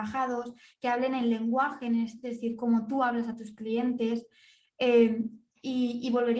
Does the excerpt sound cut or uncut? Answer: uncut